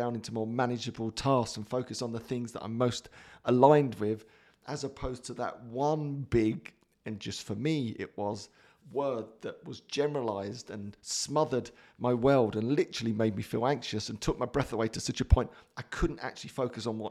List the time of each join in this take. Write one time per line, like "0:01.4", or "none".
none